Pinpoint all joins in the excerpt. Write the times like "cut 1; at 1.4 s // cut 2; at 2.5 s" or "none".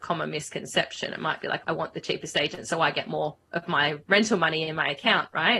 cut 1; at 1.6 s